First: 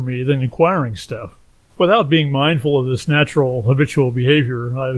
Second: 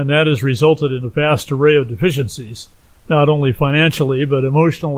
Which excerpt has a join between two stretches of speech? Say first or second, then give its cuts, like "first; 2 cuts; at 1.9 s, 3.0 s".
first; 1 cut; at 1.7 s